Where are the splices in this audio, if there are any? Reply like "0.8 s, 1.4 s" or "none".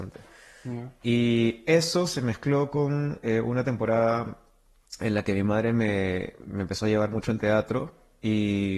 none